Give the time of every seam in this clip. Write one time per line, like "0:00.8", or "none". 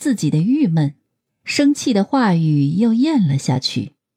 0:01.3